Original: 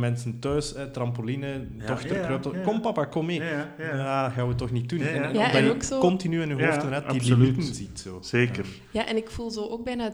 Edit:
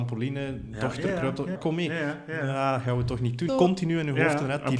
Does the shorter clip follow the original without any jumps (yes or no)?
no